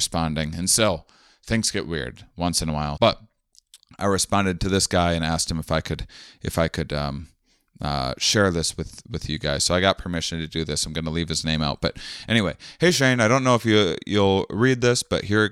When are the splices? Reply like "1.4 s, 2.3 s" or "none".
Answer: 3.0 s